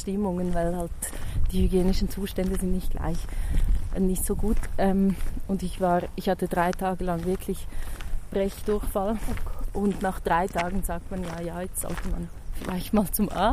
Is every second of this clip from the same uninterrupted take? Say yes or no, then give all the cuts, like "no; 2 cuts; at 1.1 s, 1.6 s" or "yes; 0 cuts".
yes; 0 cuts